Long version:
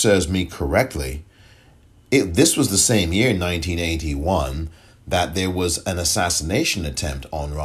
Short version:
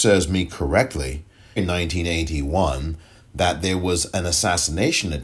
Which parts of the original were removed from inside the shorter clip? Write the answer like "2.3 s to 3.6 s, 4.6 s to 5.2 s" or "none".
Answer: 1.6 s to 3.3 s

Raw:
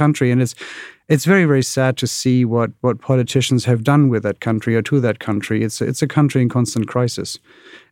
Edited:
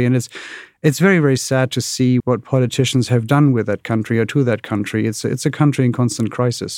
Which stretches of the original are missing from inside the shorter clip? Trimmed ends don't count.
2.5 s to 2.8 s

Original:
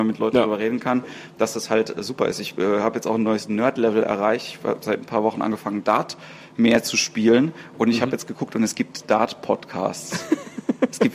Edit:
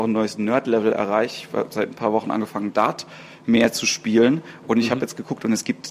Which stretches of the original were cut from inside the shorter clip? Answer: none

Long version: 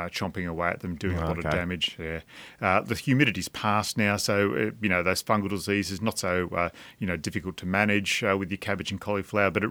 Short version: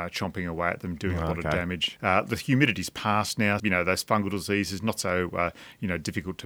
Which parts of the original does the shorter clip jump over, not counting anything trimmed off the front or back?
2.0 s to 2.5 s, 4.2 s to 4.8 s

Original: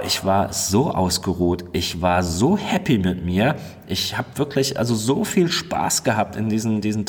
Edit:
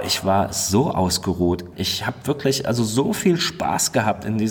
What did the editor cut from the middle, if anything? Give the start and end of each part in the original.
1.7 s to 3.8 s

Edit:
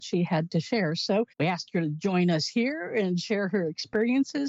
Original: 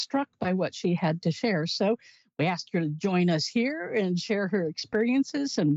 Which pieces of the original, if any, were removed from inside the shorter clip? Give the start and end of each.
2.0 s to 2.3 s

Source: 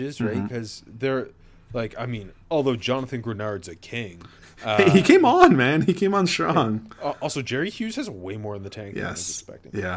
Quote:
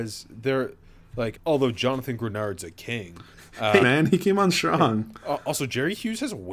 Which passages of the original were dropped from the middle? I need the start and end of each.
1.9 s to 2.4 s, 4.8 s to 5.6 s

